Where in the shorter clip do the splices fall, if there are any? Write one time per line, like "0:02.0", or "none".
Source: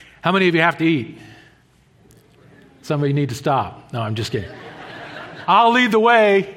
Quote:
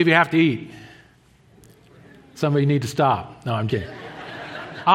0:03.7